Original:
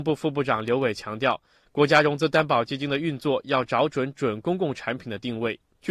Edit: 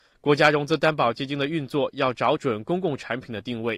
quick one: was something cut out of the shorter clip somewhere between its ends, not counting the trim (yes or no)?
yes